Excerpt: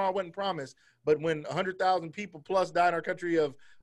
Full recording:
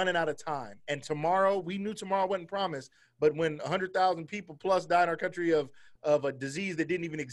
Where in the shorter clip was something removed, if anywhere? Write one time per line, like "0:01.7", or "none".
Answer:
none

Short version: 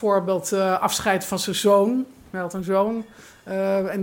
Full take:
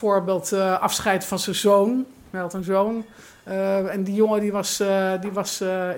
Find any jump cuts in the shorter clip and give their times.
none

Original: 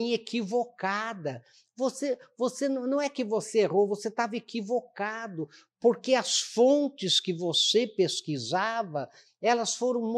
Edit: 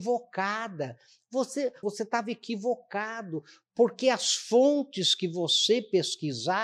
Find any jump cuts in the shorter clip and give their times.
0:01.8

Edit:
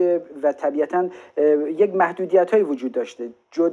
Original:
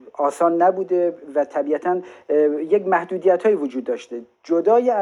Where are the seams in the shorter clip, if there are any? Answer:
none

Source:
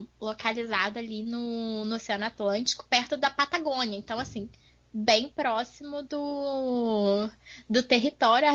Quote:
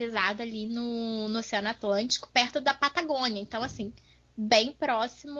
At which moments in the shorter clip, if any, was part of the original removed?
none

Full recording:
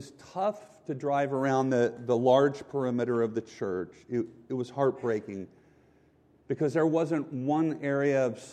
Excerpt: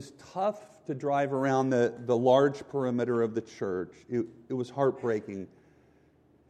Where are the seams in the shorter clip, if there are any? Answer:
none

